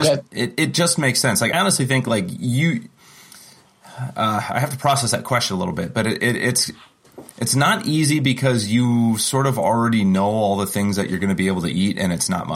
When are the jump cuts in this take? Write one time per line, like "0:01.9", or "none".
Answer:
0:01.5